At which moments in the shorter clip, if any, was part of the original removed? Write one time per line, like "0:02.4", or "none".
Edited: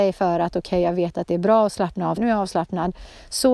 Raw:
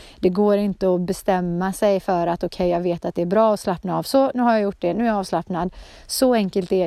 0:02.2